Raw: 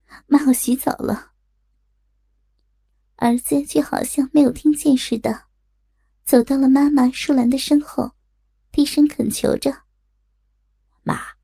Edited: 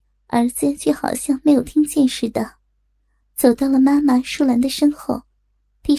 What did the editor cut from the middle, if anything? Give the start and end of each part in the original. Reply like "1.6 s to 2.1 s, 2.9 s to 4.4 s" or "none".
none